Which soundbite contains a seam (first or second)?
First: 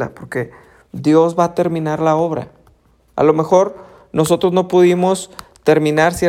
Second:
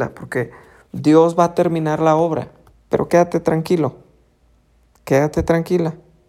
second